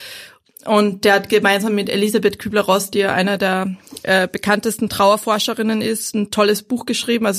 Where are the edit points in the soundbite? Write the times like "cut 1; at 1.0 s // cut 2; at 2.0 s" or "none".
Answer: none